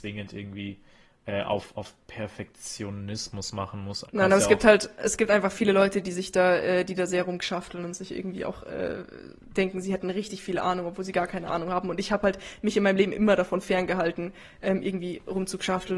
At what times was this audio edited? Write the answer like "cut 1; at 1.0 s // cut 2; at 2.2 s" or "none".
cut 1; at 4.0 s

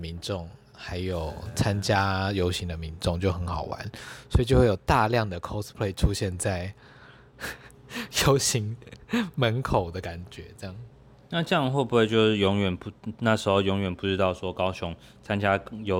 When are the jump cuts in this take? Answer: none

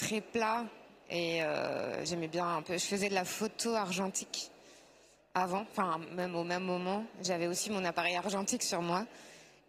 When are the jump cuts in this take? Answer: none

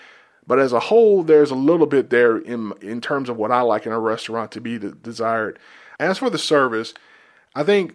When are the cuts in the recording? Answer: cut 1; at 6.0 s

